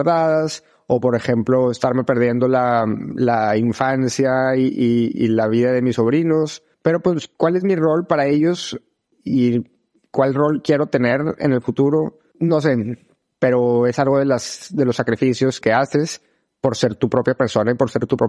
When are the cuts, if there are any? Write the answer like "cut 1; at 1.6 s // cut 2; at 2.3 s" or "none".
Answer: cut 1; at 6.7 s // cut 2; at 15.6 s